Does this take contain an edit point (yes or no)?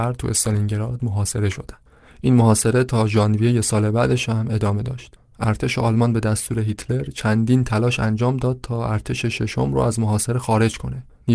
no